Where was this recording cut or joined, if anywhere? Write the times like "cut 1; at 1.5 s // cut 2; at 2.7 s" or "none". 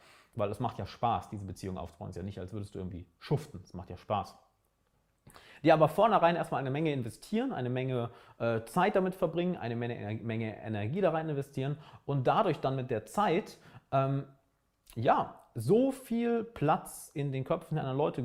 none